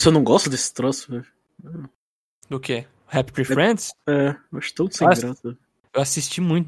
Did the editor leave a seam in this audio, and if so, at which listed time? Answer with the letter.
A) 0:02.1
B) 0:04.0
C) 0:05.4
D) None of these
D